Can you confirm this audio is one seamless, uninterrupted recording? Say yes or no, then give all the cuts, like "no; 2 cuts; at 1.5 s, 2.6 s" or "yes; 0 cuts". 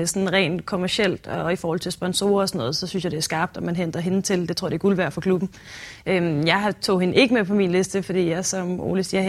yes; 0 cuts